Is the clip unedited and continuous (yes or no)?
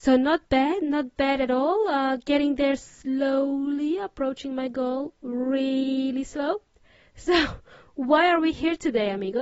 yes